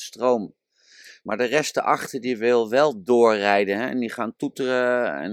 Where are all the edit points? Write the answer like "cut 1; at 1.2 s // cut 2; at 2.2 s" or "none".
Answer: none

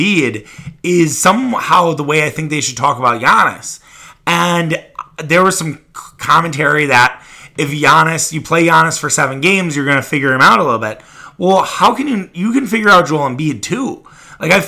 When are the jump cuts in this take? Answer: none

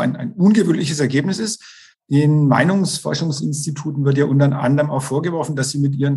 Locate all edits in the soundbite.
cut 1; at 1.9 s

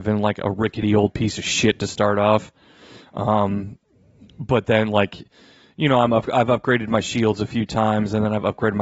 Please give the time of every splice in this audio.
none

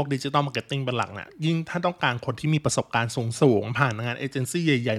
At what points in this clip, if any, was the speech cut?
none

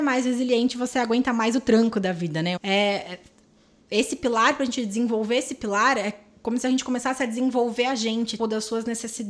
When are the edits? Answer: cut 1; at 2.6 s // cut 2; at 8.4 s

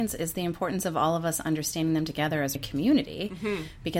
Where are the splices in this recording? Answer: cut 1; at 2.6 s

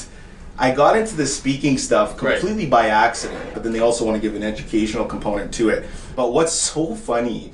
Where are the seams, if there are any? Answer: cut 1; at 3.5 s // cut 2; at 6.1 s

